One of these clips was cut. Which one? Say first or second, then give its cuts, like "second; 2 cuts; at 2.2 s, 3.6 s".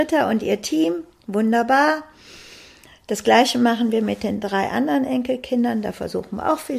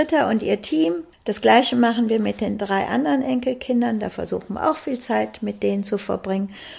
second; 1 cut; at 1.1 s